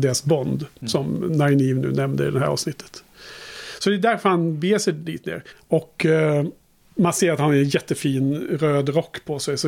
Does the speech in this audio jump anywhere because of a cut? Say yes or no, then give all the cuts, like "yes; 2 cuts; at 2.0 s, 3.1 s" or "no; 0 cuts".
yes; 1 cut; at 5.5 s